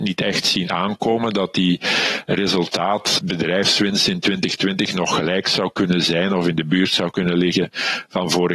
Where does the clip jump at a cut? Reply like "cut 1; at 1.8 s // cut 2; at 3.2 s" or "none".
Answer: cut 1; at 3.2 s